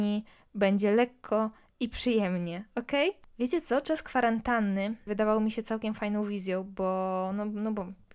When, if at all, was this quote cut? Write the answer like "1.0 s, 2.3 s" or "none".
3.2 s, 5.1 s